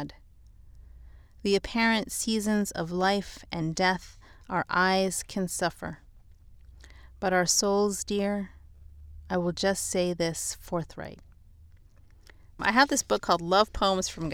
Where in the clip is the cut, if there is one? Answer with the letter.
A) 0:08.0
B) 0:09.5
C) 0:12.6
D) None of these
C